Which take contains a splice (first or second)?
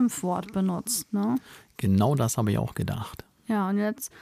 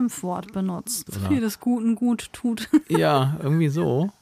second